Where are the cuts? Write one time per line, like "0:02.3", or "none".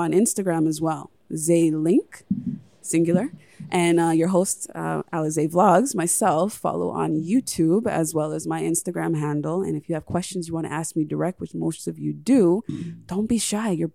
none